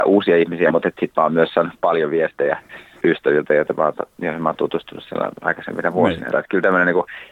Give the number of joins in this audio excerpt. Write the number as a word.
one